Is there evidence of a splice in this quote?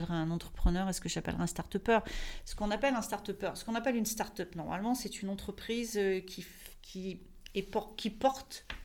no; 0 cuts

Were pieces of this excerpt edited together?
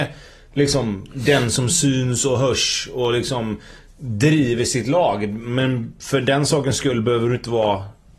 no; 0 cuts

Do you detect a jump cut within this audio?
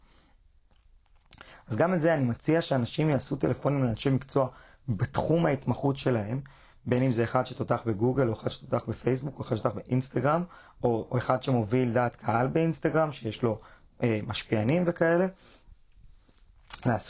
no; 0 cuts

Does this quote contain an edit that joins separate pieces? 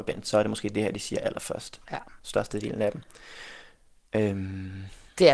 yes; 1 cut; at 1.8 s

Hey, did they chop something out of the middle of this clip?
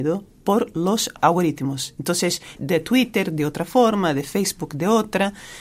yes; 1 cut; at 2.5 s

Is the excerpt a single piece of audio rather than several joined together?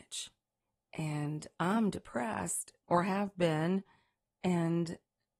no; 1 cut; at 2.8 s

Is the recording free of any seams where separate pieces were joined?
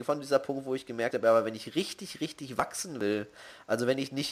yes; 0 cuts

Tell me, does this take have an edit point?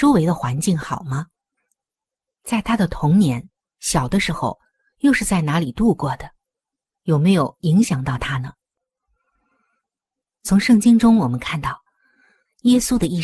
no; 0 cuts

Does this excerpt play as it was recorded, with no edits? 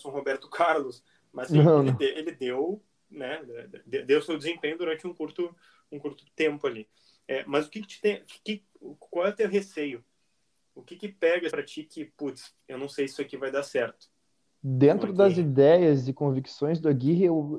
no; 1 cut; at 11.5 s

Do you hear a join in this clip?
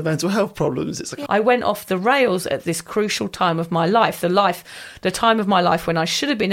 yes; 1 cut; at 1.3 s

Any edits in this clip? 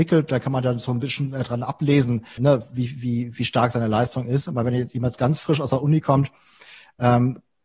yes; 1 cut; at 2.4 s

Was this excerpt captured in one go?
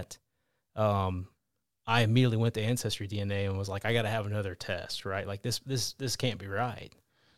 yes; 0 cuts

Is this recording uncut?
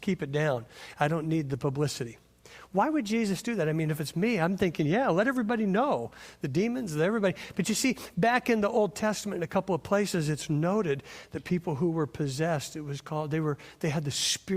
yes; 0 cuts

